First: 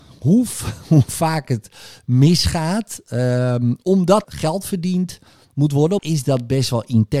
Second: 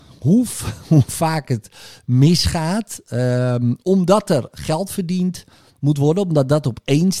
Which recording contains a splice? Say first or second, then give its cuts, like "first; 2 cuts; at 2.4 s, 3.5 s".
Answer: first; 2 cuts; at 4.2 s, 6.0 s